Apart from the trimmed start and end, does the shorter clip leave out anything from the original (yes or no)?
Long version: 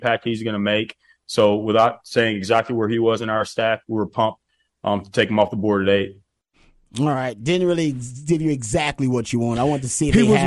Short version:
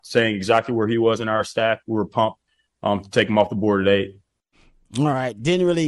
no